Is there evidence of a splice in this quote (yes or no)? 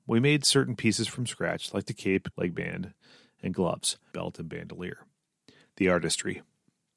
yes